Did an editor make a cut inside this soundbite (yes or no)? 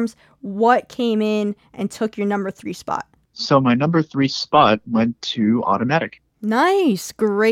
yes